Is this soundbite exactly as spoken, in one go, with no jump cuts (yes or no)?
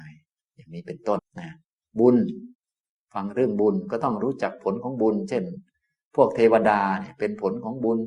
no